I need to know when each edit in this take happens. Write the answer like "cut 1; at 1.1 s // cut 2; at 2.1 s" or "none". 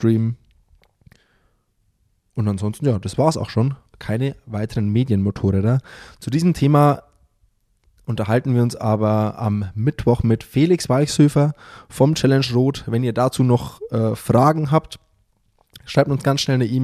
none